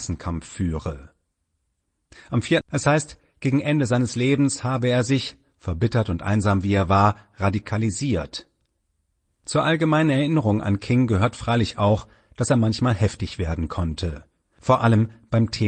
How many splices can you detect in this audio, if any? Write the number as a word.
two